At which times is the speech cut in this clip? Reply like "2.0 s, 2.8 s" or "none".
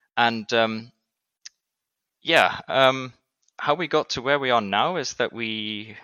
none